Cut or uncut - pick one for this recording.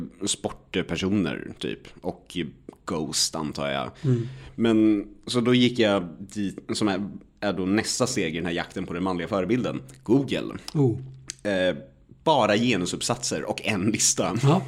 uncut